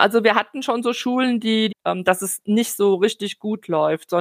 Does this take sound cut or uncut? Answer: cut